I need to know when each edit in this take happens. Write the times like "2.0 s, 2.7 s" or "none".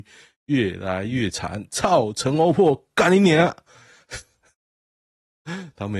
none